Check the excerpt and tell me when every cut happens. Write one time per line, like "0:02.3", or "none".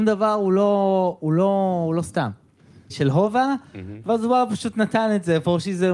0:02.9